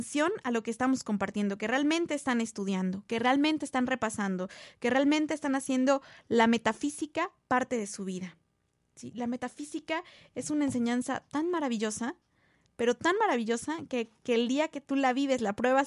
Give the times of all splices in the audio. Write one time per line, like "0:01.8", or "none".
none